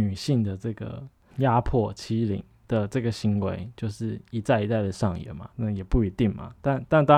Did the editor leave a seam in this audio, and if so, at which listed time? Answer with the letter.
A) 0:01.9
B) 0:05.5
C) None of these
B